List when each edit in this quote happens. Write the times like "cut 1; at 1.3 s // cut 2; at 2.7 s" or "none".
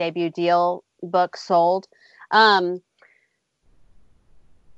none